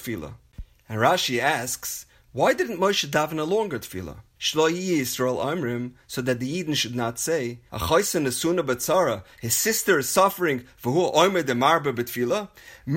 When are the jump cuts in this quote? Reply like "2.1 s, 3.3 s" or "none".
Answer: 4.4 s, 7.7 s